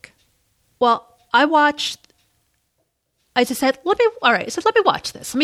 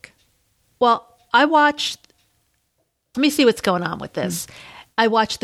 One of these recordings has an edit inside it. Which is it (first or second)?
second